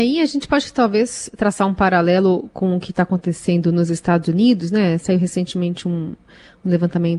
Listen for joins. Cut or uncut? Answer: uncut